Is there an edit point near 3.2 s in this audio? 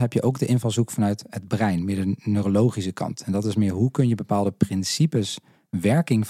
no; 0 cuts

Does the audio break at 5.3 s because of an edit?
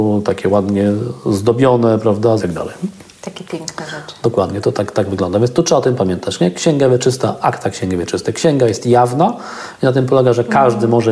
no; 1 cut; at 2.4 s

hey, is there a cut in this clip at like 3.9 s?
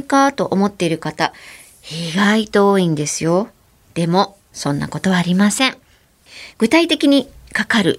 no; 1 cut; at 6.5 s

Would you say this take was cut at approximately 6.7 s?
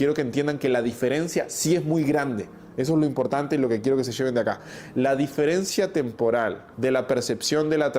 yes; 1 cut; at 6.7 s

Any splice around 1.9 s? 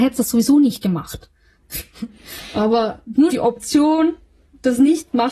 no; 1 cut; at 3.3 s

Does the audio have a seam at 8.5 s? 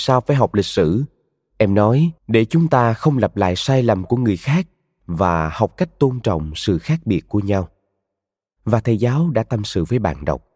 no; 1 cut; at 2.2 s

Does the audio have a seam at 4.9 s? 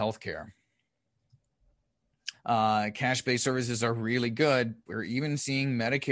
yes; 2 cuts; at 2.3 s, 4.9 s

